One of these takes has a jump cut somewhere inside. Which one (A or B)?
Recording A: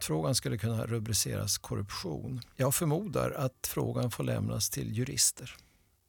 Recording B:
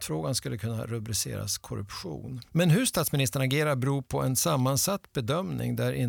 B